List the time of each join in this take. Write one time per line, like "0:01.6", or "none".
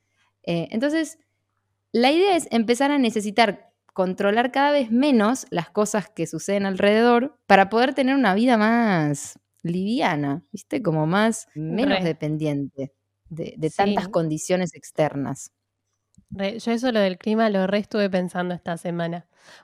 0:07.4
0:11.6